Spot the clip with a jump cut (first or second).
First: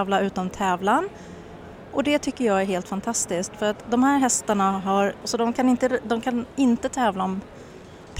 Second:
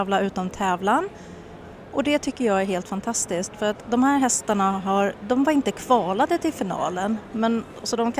first